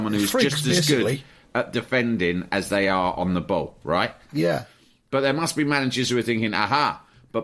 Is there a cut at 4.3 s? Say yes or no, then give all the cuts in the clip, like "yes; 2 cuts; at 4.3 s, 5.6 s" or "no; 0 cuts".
yes; 1 cut; at 4.3 s